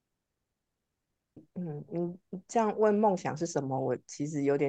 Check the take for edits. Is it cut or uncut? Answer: cut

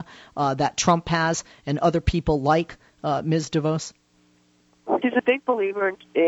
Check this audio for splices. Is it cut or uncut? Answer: cut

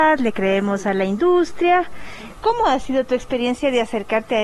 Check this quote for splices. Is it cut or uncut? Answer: cut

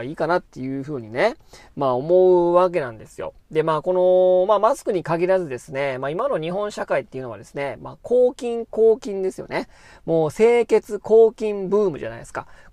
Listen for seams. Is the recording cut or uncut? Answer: uncut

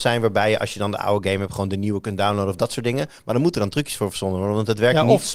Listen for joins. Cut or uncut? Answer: uncut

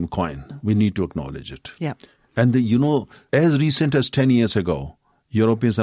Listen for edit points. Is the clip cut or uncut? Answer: uncut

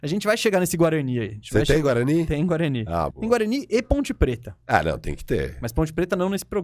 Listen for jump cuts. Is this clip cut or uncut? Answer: cut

